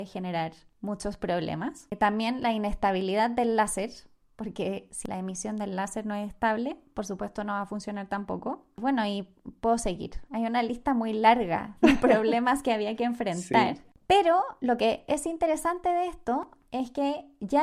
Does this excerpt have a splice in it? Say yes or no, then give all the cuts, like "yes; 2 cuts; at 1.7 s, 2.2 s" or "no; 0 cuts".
no; 0 cuts